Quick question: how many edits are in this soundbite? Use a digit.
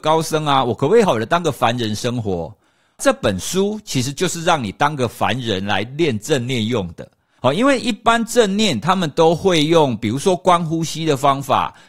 1